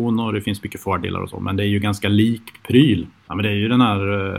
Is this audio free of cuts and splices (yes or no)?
no